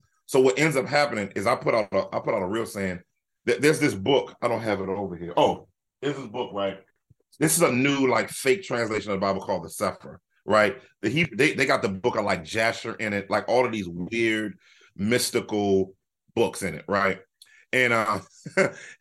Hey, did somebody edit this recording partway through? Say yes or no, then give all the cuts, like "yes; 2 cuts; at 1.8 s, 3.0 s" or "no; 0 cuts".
no; 0 cuts